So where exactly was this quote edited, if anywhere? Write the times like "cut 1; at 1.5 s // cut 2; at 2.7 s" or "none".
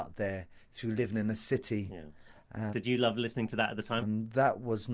cut 1; at 2.7 s // cut 2; at 4.0 s